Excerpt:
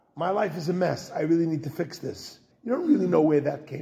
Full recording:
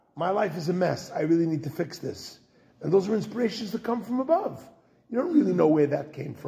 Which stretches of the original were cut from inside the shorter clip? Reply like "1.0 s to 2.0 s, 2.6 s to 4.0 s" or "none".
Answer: 2.5 s to 5.0 s